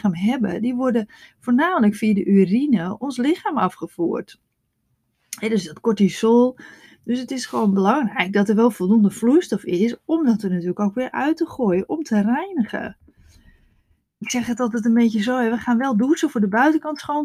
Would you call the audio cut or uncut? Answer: uncut